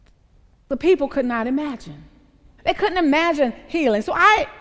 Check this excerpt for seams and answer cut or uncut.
cut